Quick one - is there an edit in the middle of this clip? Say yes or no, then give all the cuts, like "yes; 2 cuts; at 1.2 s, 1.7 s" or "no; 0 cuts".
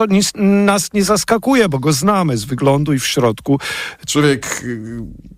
yes; 1 cut; at 4.1 s